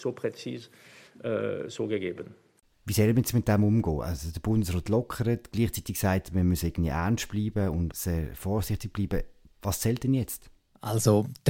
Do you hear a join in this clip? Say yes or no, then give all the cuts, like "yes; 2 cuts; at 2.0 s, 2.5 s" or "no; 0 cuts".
no; 0 cuts